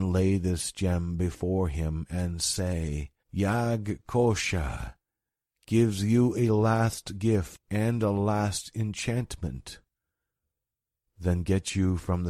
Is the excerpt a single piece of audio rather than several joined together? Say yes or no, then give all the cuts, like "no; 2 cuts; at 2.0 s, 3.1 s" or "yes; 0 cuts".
no; 1 cut; at 3.2 s